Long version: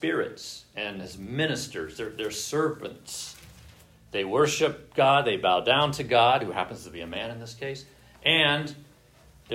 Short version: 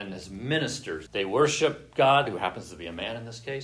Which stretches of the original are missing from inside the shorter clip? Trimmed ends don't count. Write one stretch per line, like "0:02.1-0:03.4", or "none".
0:01.9-0:04.1
0:05.2-0:06.4